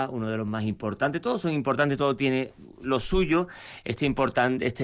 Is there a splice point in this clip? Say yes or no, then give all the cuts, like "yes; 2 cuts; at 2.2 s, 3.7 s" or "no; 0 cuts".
no; 0 cuts